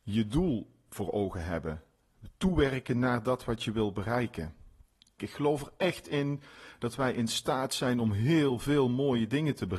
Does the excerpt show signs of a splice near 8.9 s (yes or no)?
no